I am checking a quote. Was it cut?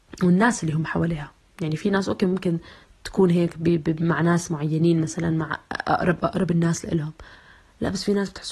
no; 0 cuts

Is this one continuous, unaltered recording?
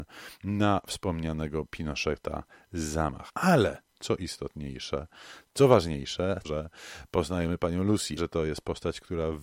no; 3 cuts; at 3.3 s, 6.4 s, 8.2 s

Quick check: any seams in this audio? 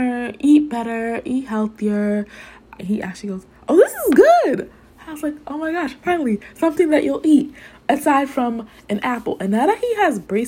yes; 1 cut; at 2.8 s

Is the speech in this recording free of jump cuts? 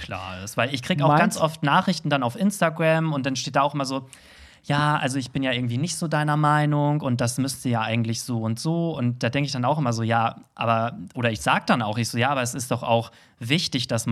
yes; 0 cuts

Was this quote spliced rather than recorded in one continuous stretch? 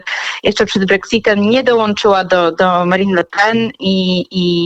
no; 0 cuts

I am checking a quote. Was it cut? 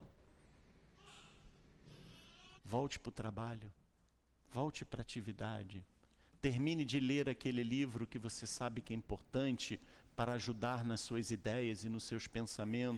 yes; 1 cut; at 2.6 s

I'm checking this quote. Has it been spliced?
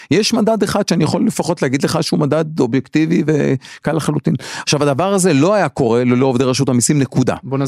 yes; 1 cut; at 4.6 s

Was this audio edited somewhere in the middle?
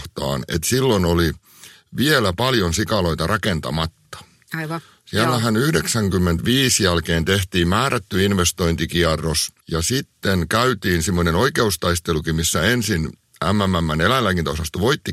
yes; 1 cut; at 9.6 s

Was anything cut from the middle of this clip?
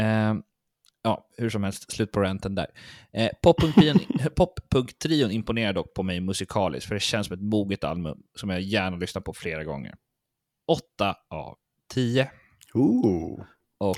no; 0 cuts

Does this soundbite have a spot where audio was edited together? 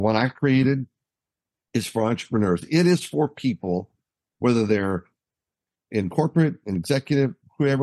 no; 0 cuts

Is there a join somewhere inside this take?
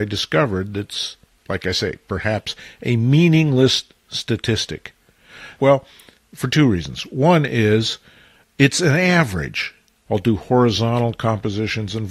yes; 2 cuts; at 5.6 s, 10.1 s

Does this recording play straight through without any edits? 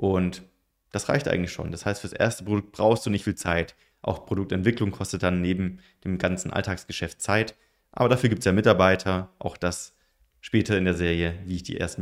no; 1 cut; at 3.9 s

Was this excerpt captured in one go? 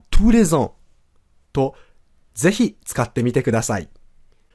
no; 1 cut; at 1.4 s

